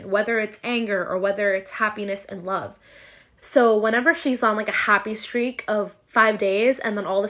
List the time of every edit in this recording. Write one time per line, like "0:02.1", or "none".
0:03.4